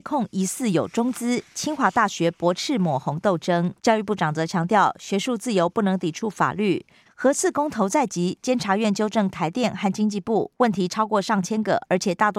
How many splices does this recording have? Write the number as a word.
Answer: three